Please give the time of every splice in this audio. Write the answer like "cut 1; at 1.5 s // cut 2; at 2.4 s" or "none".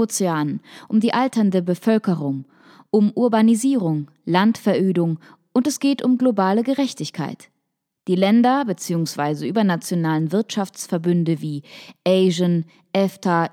none